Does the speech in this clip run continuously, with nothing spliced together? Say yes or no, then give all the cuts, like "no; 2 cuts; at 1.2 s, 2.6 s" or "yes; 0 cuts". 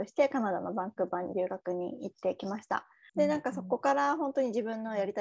no; 1 cut; at 3.1 s